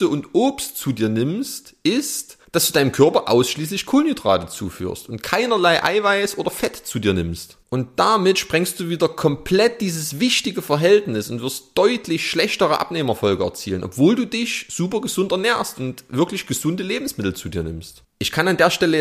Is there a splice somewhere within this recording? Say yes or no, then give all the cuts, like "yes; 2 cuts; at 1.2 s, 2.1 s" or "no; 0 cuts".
yes; 1 cut; at 18.0 s